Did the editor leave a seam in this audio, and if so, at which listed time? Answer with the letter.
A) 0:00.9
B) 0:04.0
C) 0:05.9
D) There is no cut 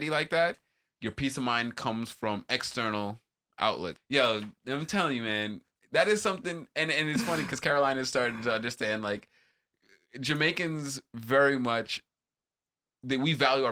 B